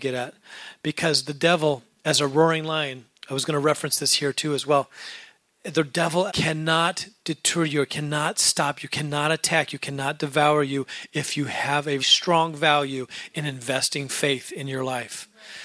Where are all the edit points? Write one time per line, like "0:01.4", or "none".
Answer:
0:06.3
0:12.0

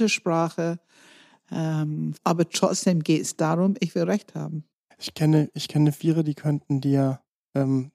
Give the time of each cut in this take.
0:02.1

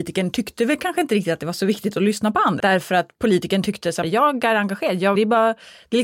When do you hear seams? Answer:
0:02.6
0:04.0
0:05.1

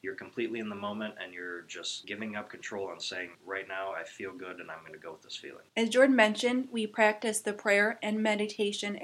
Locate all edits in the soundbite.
0:05.7

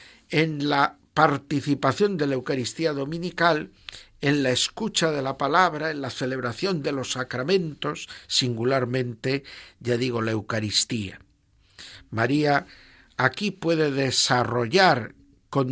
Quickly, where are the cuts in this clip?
none

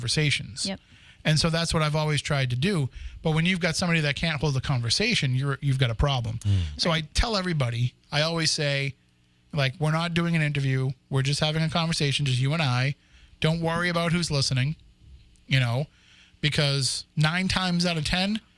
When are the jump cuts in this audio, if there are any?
0:08.0

